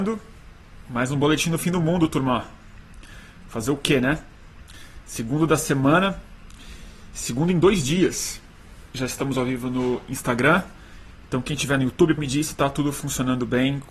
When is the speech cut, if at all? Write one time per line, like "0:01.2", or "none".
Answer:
0:12.2